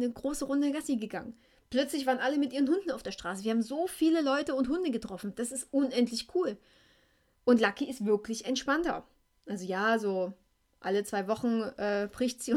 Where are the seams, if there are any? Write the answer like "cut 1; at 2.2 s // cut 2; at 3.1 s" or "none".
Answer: none